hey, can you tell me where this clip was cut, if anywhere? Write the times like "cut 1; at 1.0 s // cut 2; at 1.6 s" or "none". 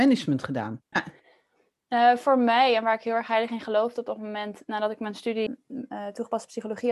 cut 1; at 0.9 s // cut 2; at 5.5 s